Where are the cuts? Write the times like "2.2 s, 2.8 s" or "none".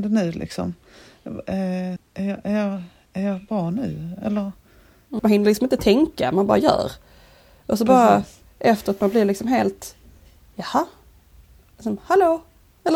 2.0 s, 5.2 s

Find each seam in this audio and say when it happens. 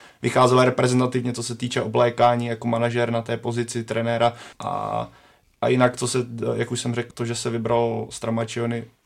4.5 s, 7.1 s

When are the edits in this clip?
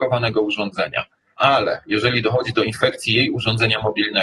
1.3 s

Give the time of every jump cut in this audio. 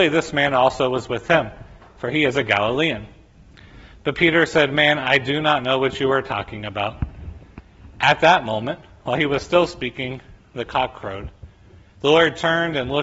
none

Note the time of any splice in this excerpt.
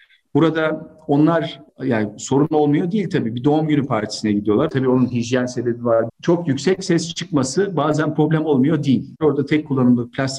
4.7 s, 6.1 s, 9.2 s

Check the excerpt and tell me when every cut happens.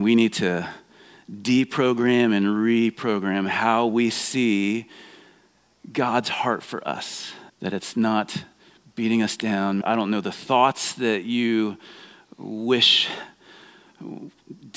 7.5 s, 9.8 s

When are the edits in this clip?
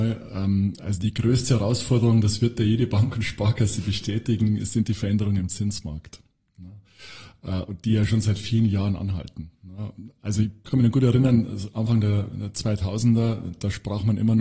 none

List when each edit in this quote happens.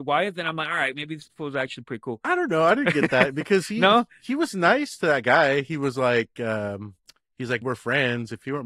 7.6 s

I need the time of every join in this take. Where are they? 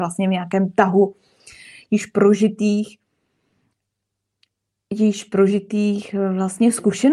none

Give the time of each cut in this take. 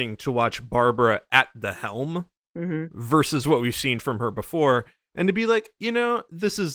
5.8 s

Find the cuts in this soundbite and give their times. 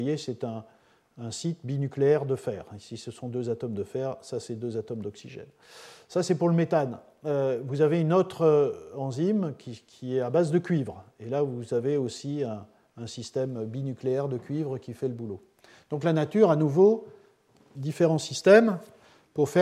17.7 s

